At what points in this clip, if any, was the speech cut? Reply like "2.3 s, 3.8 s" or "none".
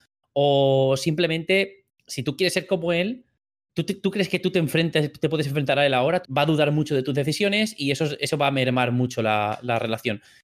6.2 s